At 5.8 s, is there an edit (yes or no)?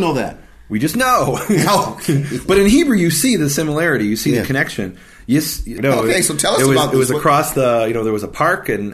yes